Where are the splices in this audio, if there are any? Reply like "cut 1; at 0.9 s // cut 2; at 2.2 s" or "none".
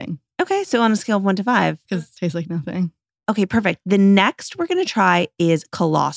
cut 1; at 1.8 s